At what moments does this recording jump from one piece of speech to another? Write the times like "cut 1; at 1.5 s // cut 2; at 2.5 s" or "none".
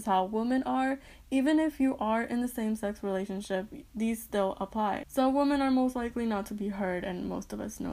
cut 1; at 5.0 s

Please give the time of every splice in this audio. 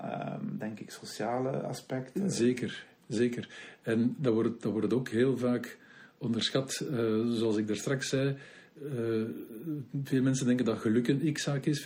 none

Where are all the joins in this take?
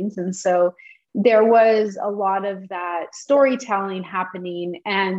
none

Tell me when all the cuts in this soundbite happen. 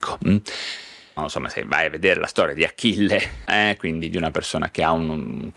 cut 1; at 1.2 s // cut 2; at 3.4 s

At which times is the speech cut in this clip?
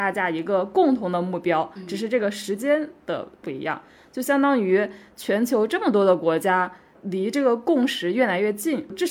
none

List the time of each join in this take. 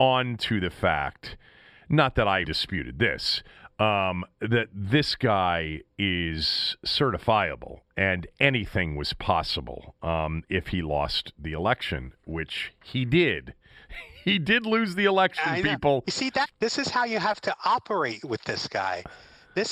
cut 1; at 2.4 s // cut 2; at 16.4 s

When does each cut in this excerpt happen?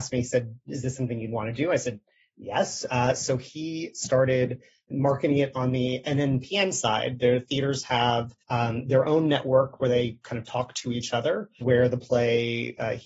cut 1; at 8.4 s // cut 2; at 11.6 s

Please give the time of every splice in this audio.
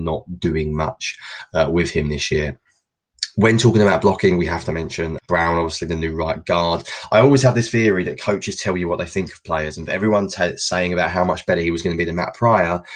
cut 1; at 5.2 s

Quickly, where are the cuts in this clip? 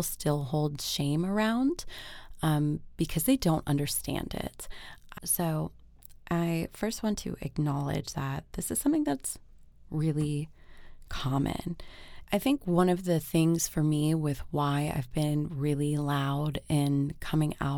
cut 1; at 5.1 s // cut 2; at 12.3 s

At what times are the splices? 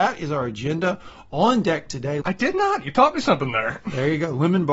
cut 1; at 2.2 s

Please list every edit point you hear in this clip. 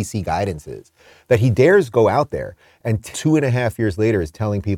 cut 1; at 3.1 s

